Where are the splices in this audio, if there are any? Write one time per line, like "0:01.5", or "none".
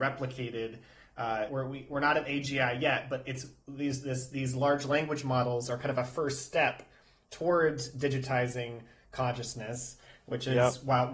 0:01.5